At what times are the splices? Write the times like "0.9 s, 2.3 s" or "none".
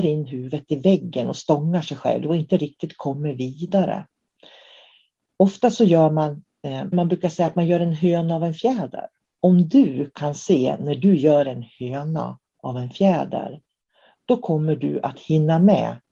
6.9 s, 9.4 s